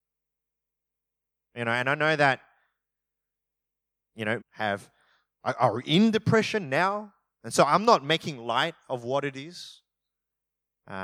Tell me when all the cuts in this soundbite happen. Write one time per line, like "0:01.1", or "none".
0:01.4
0:04.4